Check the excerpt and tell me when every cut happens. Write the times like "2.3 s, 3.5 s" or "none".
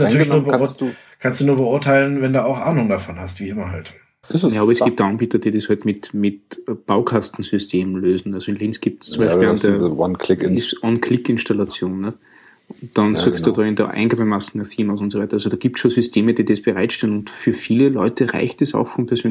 4.2 s